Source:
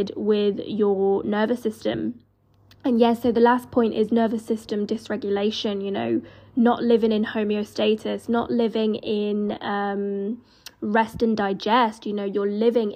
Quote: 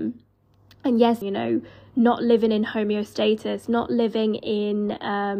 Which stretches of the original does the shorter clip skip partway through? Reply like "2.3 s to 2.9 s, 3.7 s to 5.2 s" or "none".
3.2 s to 5.8 s